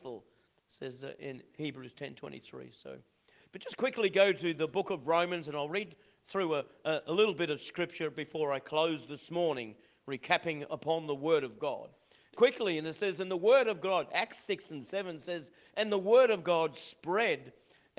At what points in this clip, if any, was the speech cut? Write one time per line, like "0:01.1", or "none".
0:12.3